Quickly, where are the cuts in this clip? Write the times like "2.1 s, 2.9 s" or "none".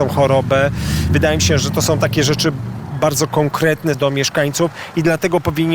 1.6 s, 3.9 s